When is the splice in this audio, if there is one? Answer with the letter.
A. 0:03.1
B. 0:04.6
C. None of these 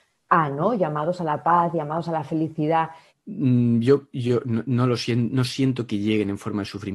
A